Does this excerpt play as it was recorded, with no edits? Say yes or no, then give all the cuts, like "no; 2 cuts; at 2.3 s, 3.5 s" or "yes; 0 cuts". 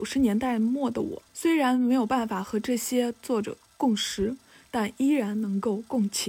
no; 1 cut; at 1.3 s